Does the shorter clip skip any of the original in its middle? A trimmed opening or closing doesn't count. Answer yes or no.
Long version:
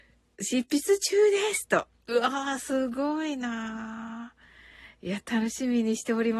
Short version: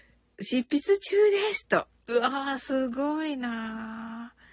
no